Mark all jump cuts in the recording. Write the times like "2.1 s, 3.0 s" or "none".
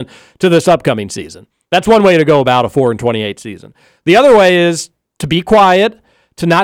none